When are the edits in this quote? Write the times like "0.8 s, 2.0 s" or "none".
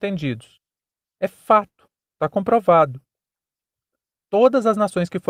1.0 s

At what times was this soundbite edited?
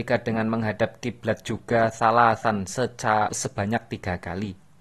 3.3 s

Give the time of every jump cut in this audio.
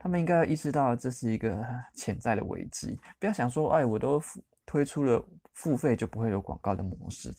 none

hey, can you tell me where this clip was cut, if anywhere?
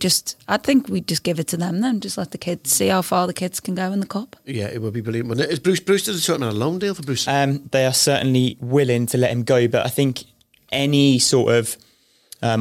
7.3 s

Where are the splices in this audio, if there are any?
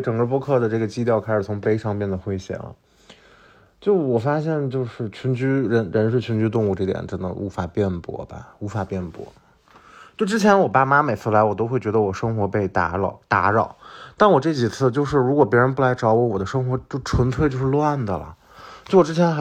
none

